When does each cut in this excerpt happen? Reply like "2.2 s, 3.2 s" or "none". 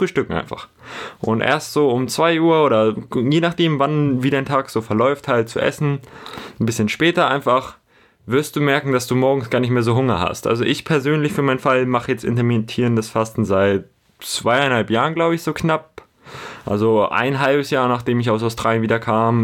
none